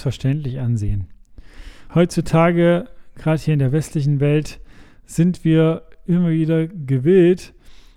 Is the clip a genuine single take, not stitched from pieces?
no; 1 cut; at 1.9 s

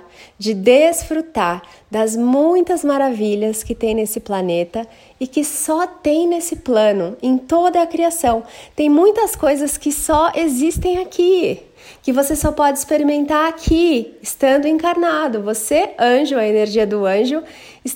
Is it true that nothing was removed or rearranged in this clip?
yes; 0 cuts

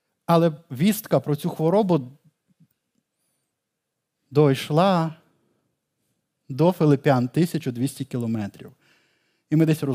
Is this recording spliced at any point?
no; 0 cuts

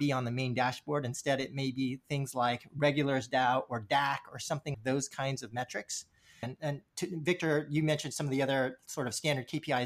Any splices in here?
yes; 2 cuts; at 4.7 s, 6.4 s

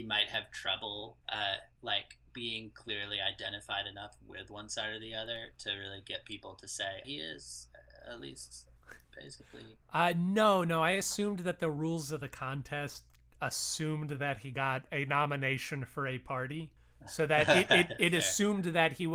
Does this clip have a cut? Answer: yes; 2 cuts; at 7.0 s, 9.0 s

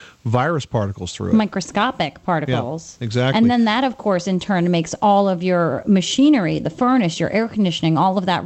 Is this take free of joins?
yes; 0 cuts

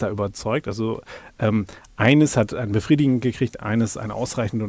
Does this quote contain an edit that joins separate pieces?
no; 0 cuts

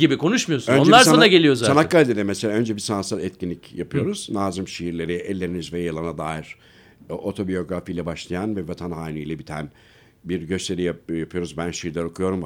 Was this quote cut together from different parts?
no; 0 cuts

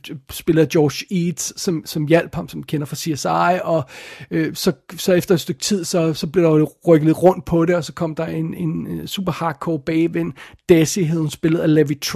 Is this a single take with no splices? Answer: yes; 0 cuts

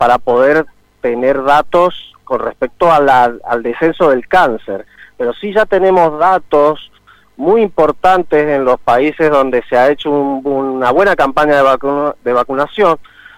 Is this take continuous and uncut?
yes; 0 cuts

